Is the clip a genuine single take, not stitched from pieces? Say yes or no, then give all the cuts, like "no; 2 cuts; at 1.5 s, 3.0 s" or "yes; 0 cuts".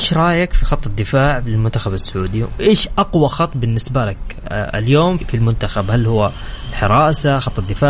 no; 1 cut; at 5.2 s